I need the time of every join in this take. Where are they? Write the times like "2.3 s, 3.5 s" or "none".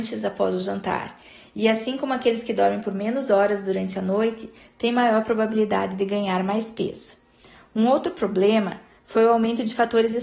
none